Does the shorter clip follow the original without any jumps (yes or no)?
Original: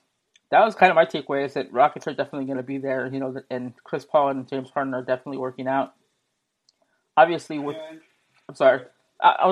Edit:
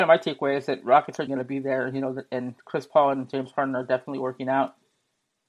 no